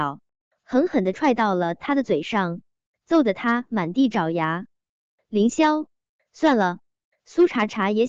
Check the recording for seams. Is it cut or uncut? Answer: uncut